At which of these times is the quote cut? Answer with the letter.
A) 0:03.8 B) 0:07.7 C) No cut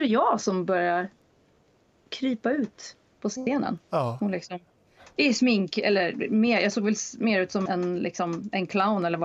B